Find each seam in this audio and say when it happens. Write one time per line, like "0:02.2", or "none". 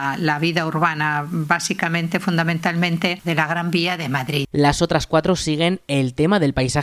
0:03.2
0:04.5